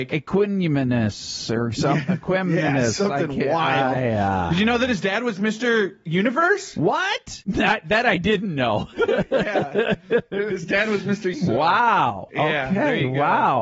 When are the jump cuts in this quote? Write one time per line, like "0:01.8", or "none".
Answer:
0:08.9
0:11.3